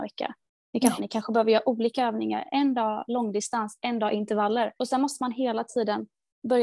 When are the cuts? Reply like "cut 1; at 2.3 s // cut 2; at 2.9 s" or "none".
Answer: cut 1; at 1.0 s // cut 2; at 4.8 s